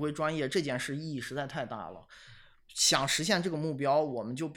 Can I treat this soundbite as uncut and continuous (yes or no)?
yes